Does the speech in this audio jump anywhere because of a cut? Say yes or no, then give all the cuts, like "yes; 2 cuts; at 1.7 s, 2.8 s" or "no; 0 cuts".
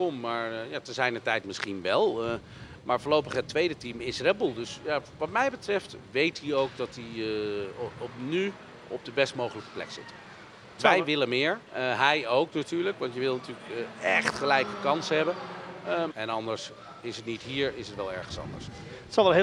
yes; 2 cuts; at 11.7 s, 16.1 s